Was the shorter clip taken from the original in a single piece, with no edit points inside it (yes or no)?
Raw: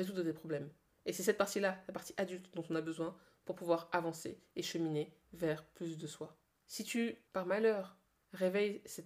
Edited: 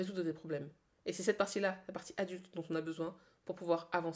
yes